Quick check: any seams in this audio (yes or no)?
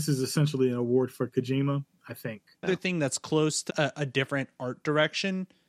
yes